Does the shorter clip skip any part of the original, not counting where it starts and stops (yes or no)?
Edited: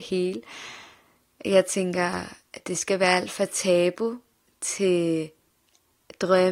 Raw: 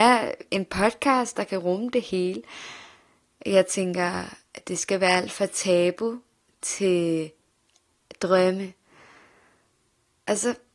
no